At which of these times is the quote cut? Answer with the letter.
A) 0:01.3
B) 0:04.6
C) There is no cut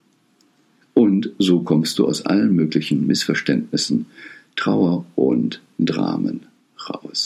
C